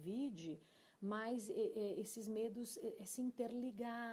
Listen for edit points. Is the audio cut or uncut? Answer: uncut